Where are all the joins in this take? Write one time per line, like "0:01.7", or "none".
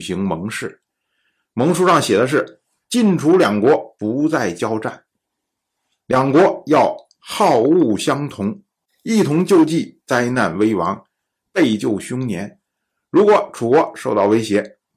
none